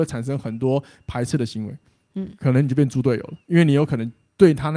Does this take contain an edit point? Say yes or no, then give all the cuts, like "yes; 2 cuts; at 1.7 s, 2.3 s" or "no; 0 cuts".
no; 0 cuts